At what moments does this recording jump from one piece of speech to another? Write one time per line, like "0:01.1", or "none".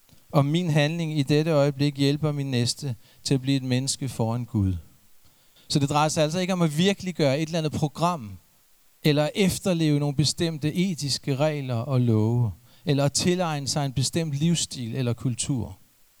0:05.6
0:08.9